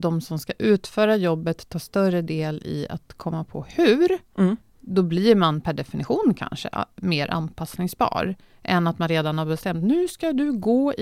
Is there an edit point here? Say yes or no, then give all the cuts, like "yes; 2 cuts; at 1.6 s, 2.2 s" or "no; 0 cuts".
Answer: no; 0 cuts